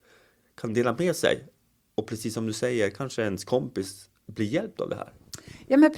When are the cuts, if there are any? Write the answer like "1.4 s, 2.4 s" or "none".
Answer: none